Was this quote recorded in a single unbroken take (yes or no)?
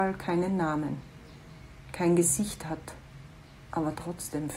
yes